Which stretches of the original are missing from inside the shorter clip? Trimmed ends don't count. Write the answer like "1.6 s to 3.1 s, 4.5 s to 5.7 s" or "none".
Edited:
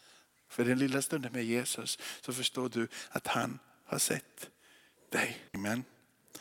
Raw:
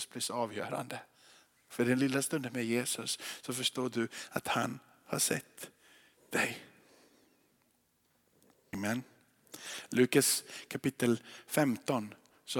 6.7 s to 8.7 s